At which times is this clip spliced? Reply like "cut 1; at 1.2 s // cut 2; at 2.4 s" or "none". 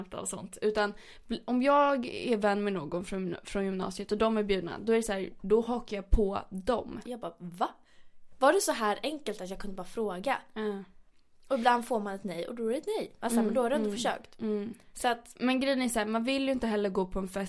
cut 1; at 7.0 s